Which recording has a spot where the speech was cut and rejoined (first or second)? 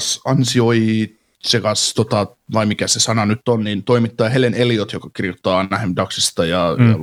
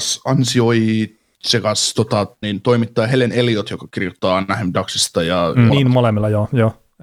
second